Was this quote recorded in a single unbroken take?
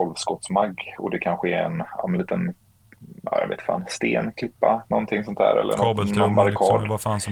yes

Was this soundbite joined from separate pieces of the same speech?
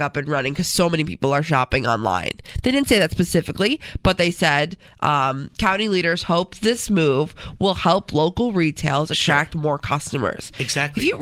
no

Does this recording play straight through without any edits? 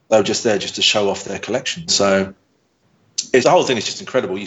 no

